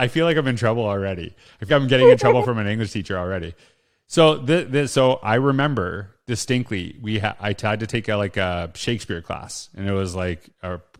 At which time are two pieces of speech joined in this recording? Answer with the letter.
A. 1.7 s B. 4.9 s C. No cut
A